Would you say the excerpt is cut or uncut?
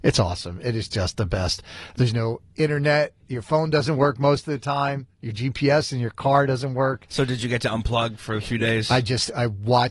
uncut